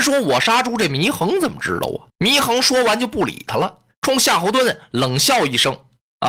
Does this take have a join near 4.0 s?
yes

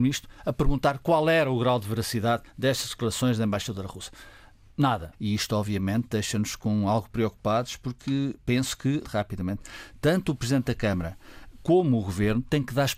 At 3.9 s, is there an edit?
no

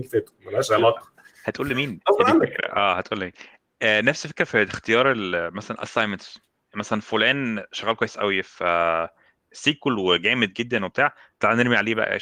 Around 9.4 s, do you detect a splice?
no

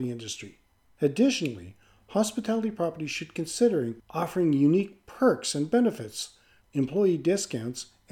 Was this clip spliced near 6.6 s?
yes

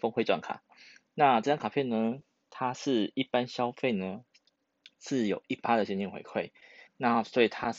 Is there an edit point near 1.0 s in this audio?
no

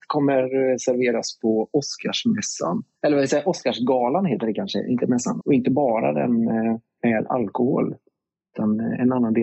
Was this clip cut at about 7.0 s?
yes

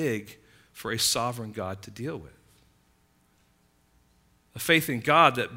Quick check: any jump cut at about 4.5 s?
no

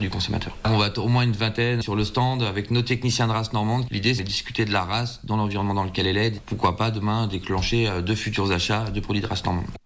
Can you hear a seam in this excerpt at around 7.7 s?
no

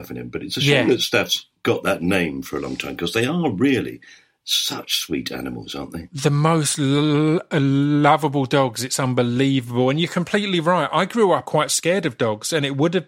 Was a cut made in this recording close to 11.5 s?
yes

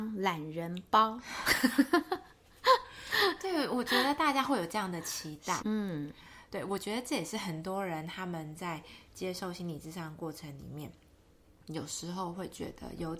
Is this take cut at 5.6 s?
yes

